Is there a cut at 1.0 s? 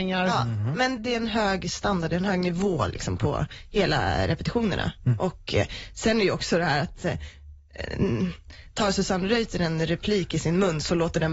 yes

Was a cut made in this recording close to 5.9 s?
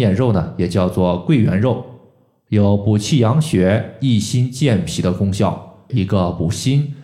yes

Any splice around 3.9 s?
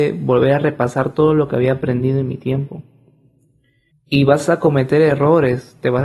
yes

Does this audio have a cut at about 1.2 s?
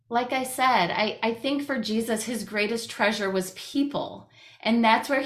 no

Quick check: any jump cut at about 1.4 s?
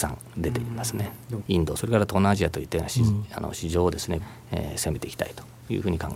yes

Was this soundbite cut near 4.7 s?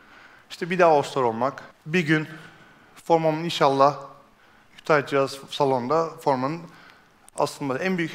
no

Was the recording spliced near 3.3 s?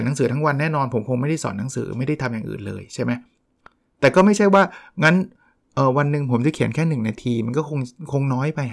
no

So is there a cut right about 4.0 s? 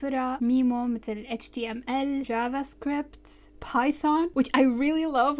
no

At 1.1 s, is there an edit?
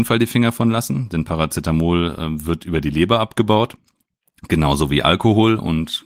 no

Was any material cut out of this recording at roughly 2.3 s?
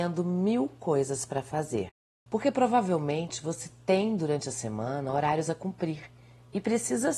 yes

